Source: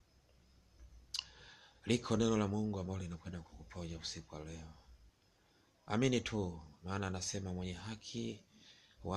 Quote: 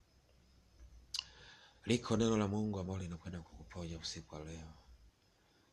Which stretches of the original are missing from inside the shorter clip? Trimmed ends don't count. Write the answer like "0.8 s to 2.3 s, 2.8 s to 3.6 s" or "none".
none